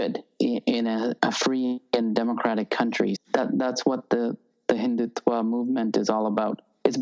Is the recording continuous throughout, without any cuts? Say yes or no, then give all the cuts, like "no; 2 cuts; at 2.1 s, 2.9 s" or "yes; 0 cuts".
no; 2 cuts; at 1.2 s, 3.1 s